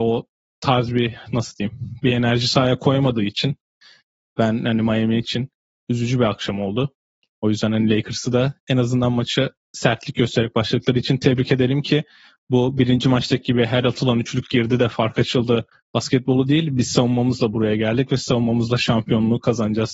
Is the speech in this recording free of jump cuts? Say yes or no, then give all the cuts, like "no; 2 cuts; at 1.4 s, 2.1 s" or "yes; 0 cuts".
yes; 0 cuts